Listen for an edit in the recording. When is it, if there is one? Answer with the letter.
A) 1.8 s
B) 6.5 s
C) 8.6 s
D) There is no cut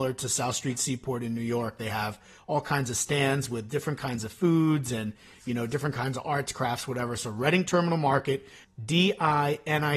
C